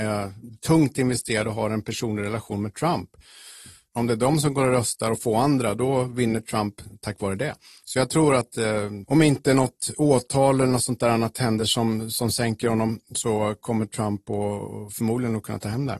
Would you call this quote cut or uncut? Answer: uncut